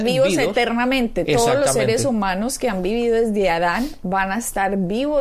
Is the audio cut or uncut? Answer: uncut